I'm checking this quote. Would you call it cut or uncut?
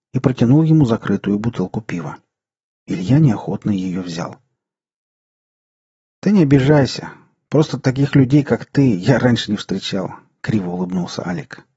uncut